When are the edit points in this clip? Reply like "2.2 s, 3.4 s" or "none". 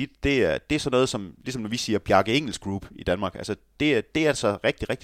none

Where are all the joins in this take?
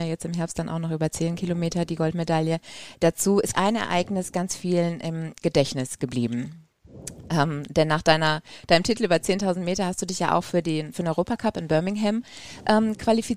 3.5 s

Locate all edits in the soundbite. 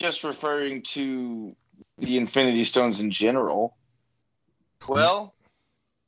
4.8 s

